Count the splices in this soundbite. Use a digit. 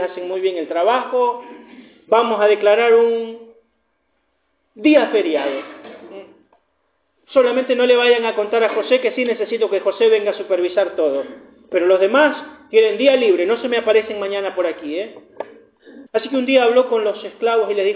1